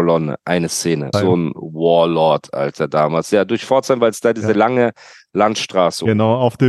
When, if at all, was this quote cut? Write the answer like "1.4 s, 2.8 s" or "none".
1.1 s